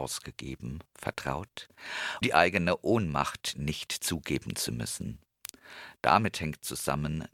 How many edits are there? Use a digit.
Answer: 1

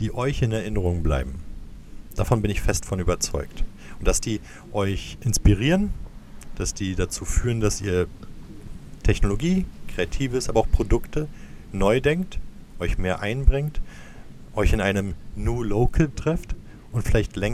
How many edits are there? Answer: 1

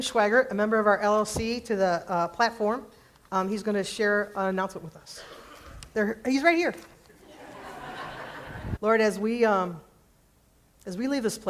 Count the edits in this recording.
1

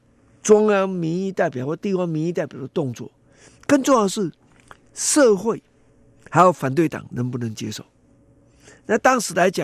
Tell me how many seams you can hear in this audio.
0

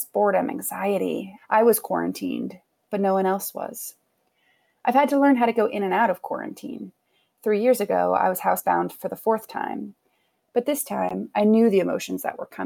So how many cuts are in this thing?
1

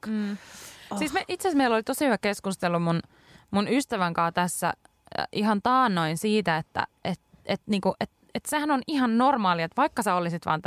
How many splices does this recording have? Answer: 0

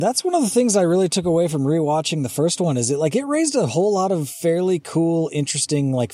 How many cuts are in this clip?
0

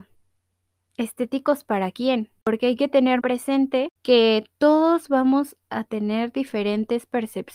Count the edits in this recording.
1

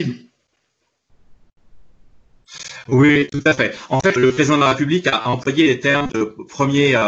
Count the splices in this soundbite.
1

